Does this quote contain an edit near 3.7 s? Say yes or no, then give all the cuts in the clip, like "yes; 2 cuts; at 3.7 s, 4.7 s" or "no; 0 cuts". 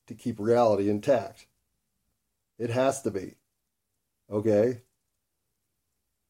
no; 1 cut; at 2.4 s